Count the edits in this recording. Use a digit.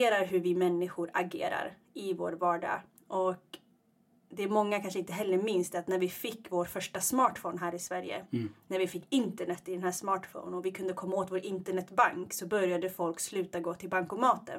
0